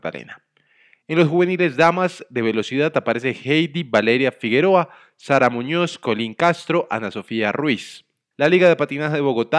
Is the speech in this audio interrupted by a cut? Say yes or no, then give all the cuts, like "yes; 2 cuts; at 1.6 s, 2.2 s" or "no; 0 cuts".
yes; 1 cut; at 8.3 s